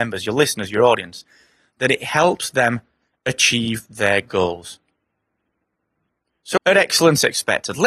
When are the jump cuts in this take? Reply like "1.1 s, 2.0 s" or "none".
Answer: 6.6 s